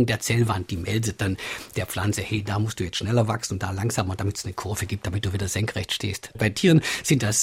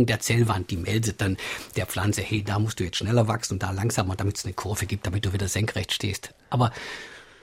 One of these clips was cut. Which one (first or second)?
first